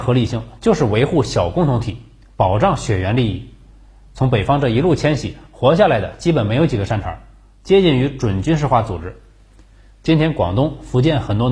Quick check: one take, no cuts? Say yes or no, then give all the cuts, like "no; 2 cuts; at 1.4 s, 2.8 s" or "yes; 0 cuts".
yes; 0 cuts